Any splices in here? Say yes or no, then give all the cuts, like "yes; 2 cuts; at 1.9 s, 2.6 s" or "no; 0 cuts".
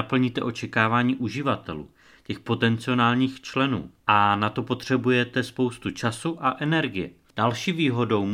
yes; 2 cuts; at 4.0 s, 7.3 s